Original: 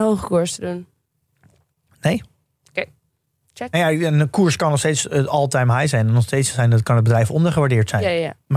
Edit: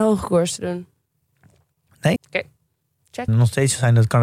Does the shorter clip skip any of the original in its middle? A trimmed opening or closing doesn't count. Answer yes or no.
yes